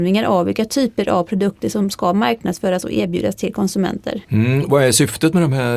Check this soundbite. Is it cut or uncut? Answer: cut